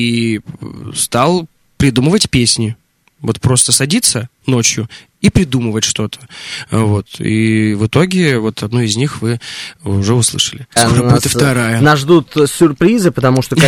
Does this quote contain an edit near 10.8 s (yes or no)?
yes